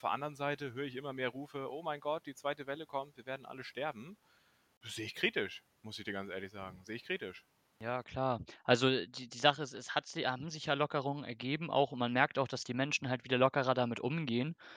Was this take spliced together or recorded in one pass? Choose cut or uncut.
uncut